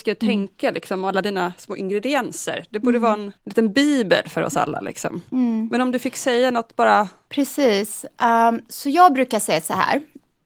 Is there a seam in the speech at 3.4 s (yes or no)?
yes